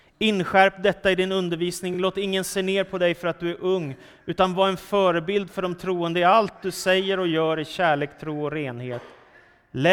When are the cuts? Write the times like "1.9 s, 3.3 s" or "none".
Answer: none

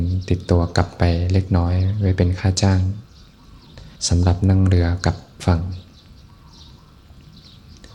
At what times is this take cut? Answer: 4.0 s

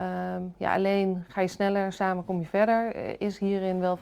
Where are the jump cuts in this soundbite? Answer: none

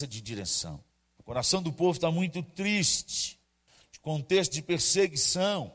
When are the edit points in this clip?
1.2 s

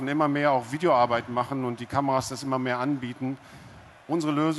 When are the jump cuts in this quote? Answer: none

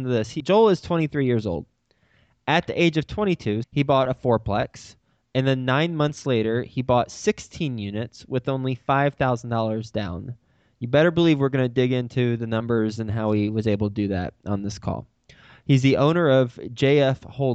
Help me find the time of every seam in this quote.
3.6 s

